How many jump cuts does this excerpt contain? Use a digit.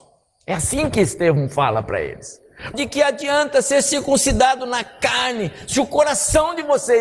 1